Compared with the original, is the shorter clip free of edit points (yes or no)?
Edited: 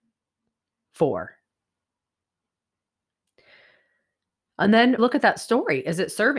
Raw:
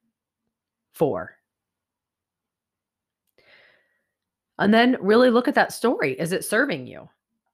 no